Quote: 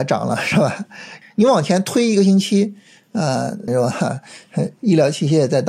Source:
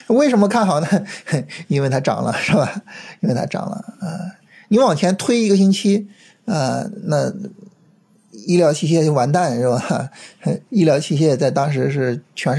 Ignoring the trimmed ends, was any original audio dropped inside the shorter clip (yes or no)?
yes